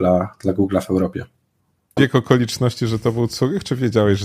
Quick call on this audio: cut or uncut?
cut